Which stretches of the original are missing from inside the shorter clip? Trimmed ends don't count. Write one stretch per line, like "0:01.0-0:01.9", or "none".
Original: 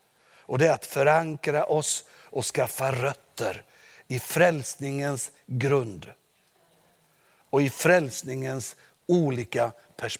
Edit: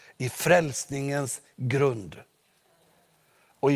none